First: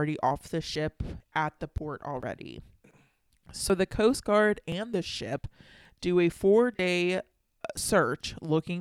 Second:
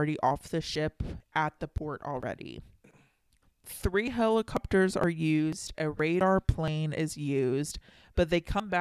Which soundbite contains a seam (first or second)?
second